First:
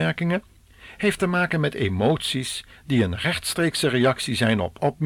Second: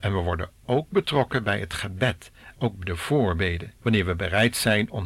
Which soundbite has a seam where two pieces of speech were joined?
second; 1 cut; at 3.8 s

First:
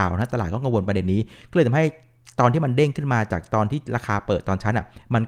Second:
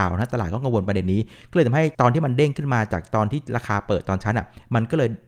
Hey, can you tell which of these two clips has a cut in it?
second; 1 cut; at 1.9 s

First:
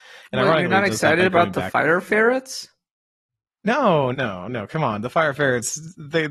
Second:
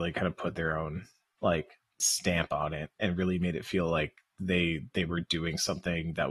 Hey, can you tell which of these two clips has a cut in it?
first; 1 cut; at 4.1 s

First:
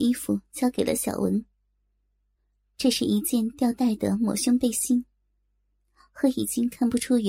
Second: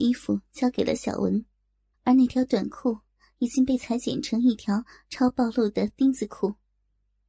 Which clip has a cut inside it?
second; 1 cut; at 1.9 s

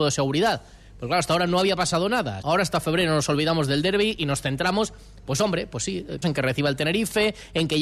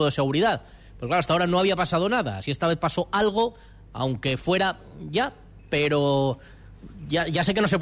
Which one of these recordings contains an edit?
first; 2 cuts; at 2.4 s, 6.2 s

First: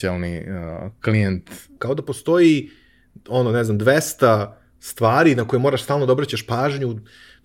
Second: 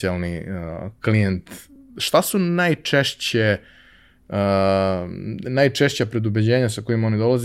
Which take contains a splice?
first; 1 cut; at 1.8 s

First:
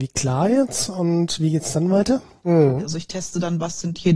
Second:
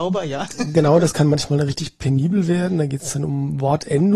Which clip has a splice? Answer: first; 1 cut; at 2.4 s

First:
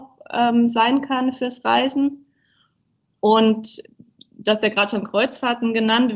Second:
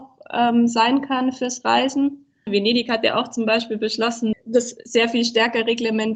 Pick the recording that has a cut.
second; 2 cuts; at 2.5 s, 4.3 s

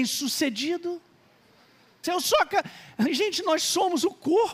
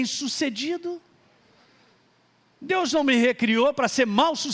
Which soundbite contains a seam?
first; 1 cut; at 2.0 s

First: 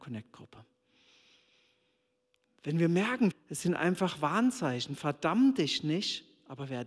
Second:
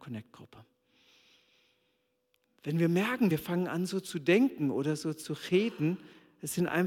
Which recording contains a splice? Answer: first; 1 cut; at 3.3 s

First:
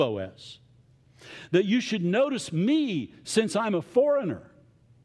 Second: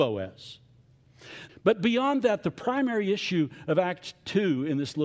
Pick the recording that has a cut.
second; 1 cut; at 1.5 s

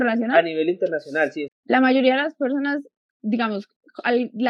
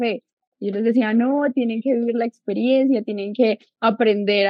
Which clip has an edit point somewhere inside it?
first; 1 cut; at 1.5 s

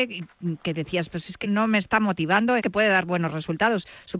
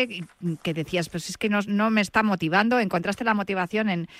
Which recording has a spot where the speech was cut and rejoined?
first; 2 cuts; at 1.4 s, 2.6 s

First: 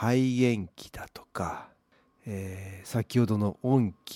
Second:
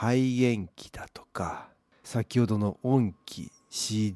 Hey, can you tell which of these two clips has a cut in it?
second; 1 cut; at 2.0 s

